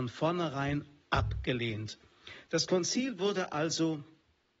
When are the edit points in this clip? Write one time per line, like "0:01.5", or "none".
0:02.5